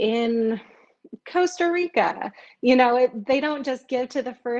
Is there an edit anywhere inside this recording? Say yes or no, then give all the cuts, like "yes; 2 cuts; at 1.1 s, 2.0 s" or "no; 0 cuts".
no; 0 cuts